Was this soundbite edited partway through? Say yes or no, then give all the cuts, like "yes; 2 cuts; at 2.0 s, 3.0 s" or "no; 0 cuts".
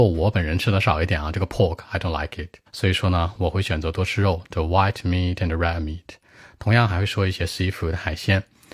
yes; 1 cut; at 2.7 s